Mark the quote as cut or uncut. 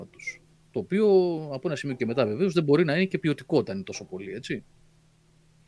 uncut